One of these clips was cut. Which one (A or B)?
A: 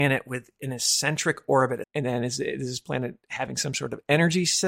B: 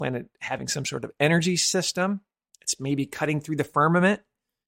A